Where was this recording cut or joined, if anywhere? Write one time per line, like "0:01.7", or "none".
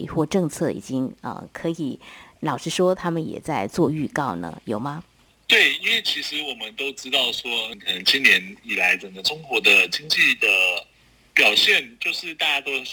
none